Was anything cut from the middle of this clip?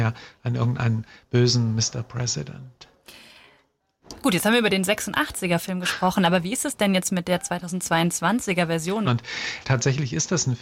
yes; 1 cut; at 9.0 s

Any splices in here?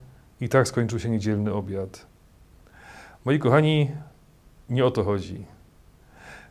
no; 0 cuts

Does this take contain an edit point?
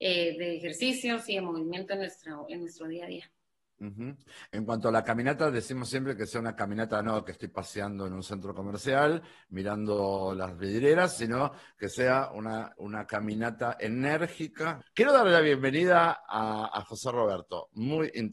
yes; 2 cuts; at 12.7 s, 14.8 s

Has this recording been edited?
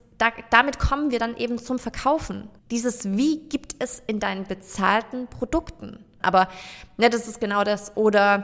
yes; 2 cuts; at 2.6 s, 6.2 s

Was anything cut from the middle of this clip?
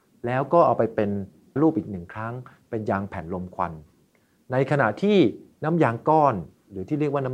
yes; 1 cut; at 1.6 s

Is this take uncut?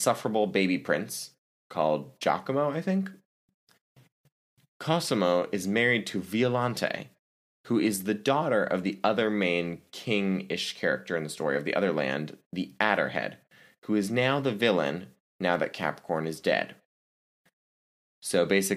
yes; 0 cuts

